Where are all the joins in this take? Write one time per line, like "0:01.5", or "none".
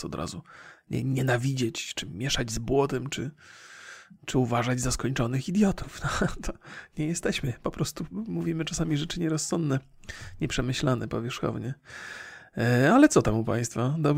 none